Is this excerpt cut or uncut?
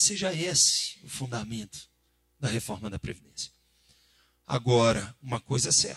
uncut